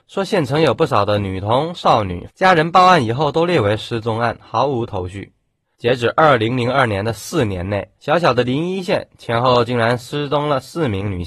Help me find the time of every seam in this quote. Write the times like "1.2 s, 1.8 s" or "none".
2.3 s, 5.6 s, 8.0 s